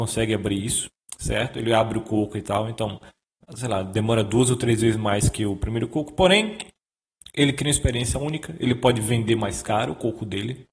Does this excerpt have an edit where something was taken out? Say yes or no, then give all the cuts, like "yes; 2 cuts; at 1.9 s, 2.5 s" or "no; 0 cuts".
no; 0 cuts